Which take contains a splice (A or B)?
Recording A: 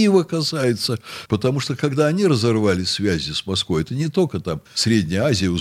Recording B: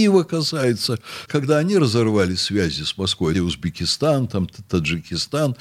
B